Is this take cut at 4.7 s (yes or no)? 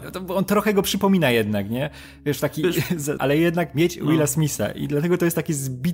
no